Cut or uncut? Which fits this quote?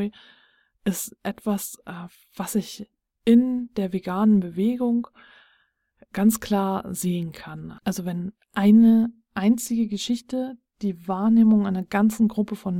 uncut